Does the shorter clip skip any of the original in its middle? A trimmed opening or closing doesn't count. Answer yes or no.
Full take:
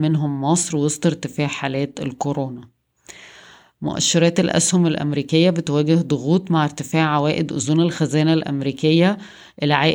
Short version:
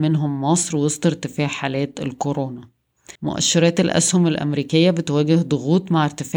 yes